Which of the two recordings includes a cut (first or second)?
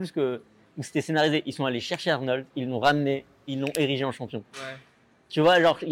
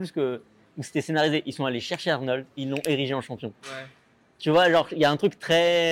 second